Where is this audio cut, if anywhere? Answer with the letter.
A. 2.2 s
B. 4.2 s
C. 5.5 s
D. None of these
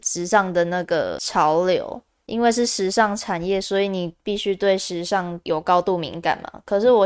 D